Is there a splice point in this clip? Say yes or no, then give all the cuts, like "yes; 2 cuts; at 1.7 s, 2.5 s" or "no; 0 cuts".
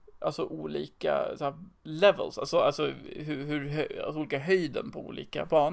yes; 1 cut; at 1.8 s